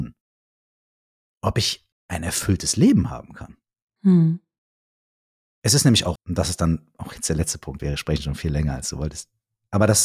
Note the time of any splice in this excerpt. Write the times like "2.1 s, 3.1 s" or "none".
6.2 s, 7.8 s